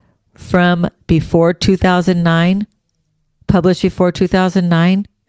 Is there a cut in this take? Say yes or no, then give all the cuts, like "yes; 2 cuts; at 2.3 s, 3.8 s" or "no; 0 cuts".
no; 0 cuts